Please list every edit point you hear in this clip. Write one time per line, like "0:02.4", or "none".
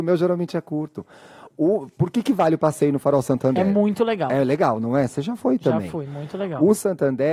none